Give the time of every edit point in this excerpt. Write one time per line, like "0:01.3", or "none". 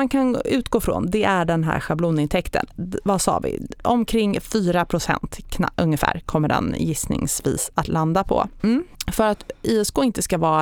0:08.6